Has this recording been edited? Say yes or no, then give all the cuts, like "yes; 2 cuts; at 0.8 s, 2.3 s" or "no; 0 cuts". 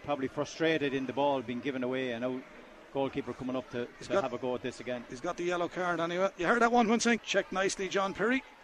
yes; 1 cut; at 7.2 s